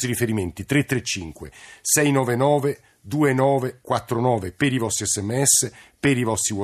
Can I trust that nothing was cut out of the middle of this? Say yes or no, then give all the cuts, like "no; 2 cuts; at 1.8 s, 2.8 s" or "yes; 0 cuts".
yes; 0 cuts